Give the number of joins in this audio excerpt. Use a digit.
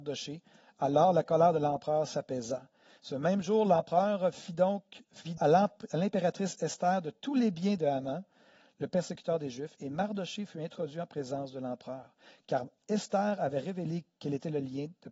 1